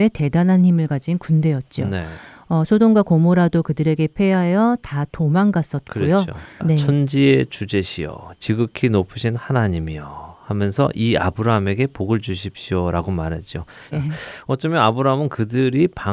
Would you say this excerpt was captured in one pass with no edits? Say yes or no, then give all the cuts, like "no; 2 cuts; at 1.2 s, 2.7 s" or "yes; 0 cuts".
no; 2 cuts; at 6.6 s, 13.9 s